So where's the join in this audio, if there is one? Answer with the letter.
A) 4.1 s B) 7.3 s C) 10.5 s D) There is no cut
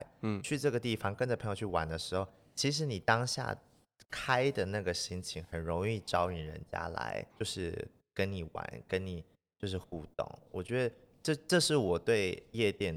B